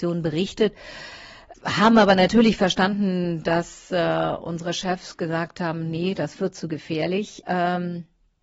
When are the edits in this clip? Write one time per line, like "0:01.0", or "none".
0:01.5
0:07.4

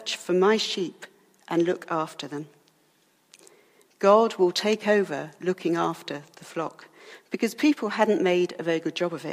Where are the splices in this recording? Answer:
none

